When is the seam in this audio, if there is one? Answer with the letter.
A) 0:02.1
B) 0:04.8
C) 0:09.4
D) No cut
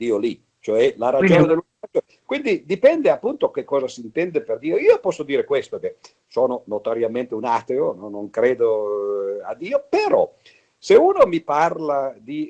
A